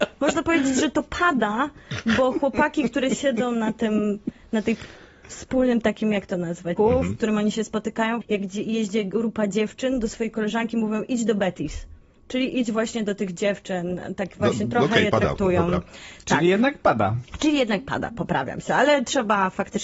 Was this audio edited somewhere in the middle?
yes; 2 cuts; at 6.8 s, 8.2 s

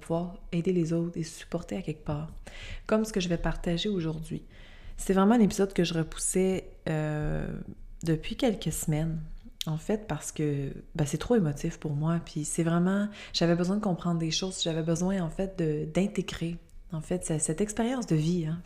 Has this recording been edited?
no; 0 cuts

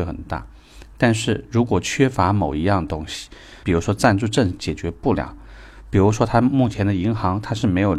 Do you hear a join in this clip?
yes; 1 cut; at 3.6 s

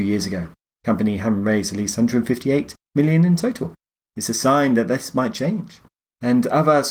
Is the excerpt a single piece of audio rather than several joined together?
no; 1 cut; at 4.0 s

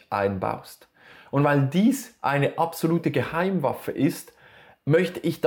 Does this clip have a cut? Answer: no; 0 cuts

